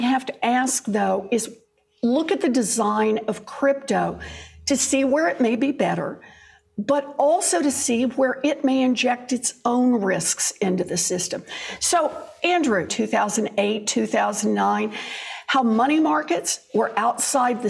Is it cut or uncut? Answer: cut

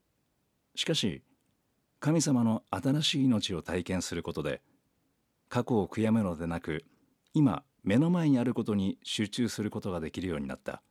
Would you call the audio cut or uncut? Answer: uncut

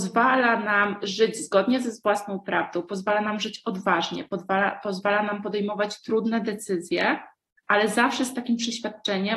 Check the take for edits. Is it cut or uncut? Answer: uncut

